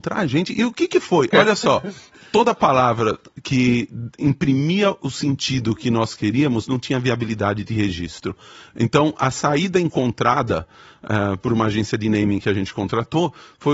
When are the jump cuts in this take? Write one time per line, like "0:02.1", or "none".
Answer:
0:01.3